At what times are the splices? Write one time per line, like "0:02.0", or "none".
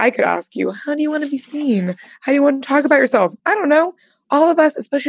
0:03.4